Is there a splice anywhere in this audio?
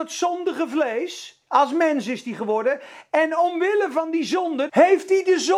yes; 1 cut; at 4.7 s

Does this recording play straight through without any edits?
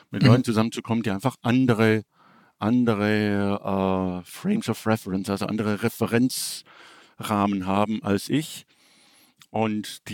yes; 0 cuts

